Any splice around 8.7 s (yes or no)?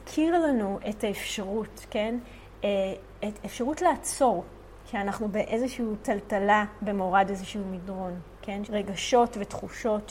yes